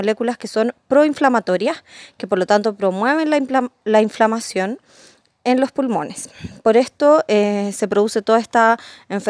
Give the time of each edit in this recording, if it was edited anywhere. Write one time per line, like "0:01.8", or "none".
none

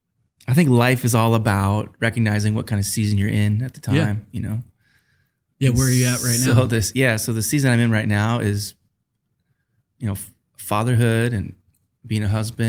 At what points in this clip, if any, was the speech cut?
none

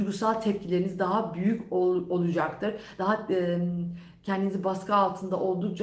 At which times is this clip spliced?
none

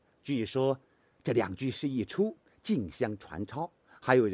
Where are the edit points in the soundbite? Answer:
none

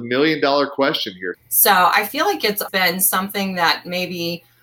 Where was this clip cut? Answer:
0:01.3
0:02.7

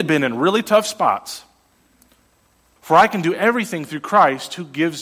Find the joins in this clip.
0:02.8

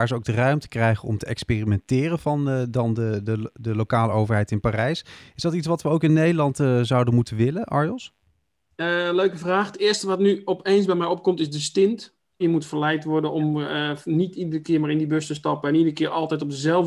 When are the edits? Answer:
0:08.7
0:12.4

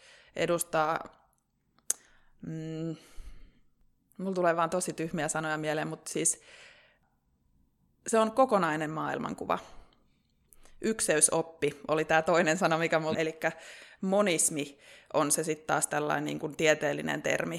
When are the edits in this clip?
0:13.1

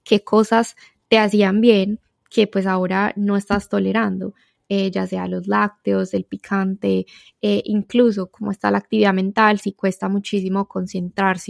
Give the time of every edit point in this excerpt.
none

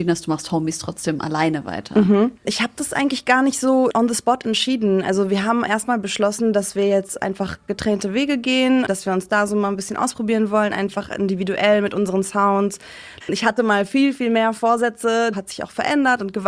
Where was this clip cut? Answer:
0:02.4
0:13.2
0:15.3

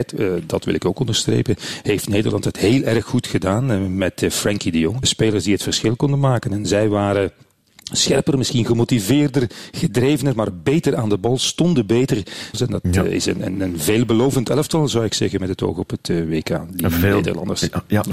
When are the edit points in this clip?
0:05.0
0:12.5

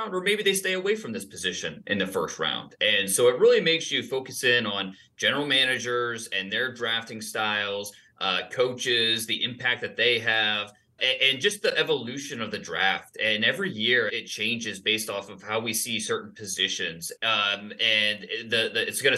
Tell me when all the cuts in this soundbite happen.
0:11.0
0:14.1
0:17.2

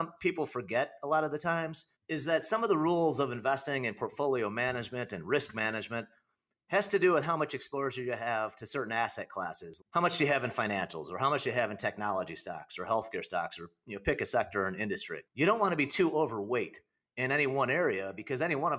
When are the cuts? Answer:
0:02.0
0:09.8
0:15.3

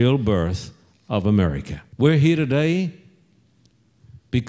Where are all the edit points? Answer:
0:01.9

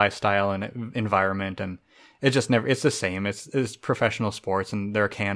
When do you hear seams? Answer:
none

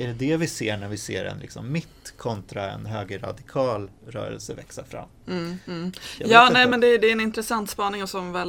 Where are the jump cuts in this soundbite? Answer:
none

